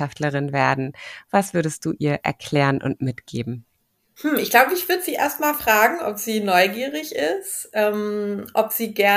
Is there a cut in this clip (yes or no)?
no